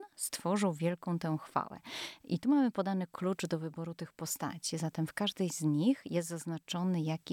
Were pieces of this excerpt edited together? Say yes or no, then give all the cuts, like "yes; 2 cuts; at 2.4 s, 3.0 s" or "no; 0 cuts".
no; 0 cuts